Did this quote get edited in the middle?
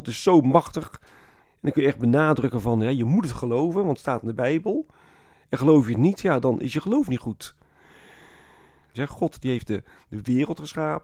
yes; 2 cuts; at 1.4 s, 8.9 s

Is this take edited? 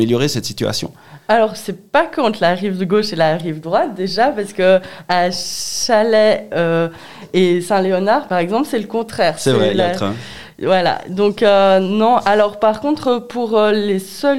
no; 0 cuts

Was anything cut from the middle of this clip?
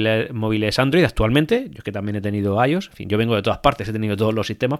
no; 0 cuts

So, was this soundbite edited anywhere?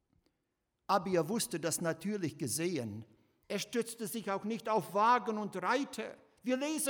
yes; 1 cut; at 3.4 s

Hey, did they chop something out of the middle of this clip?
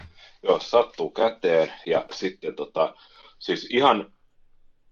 no; 0 cuts

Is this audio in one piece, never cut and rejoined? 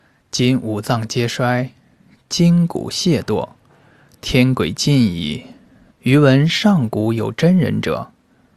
no; 1 cut; at 5.9 s

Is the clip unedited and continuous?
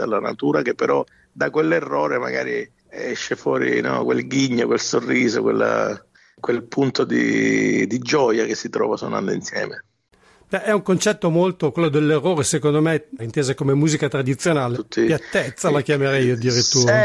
no; 2 cuts; at 13.2 s, 14.7 s

